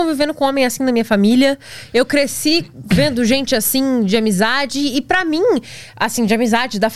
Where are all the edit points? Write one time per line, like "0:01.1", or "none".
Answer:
none